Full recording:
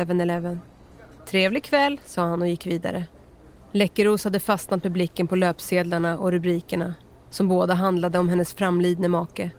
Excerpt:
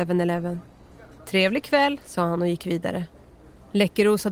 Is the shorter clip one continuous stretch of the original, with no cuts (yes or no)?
yes